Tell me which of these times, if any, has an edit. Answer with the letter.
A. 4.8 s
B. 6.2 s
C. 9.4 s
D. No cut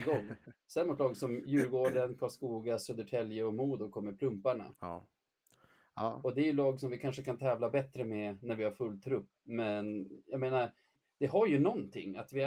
C